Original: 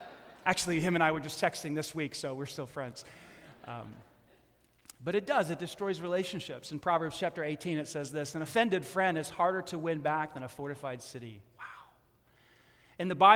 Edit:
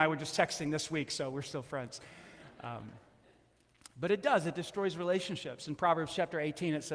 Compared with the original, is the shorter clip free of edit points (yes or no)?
yes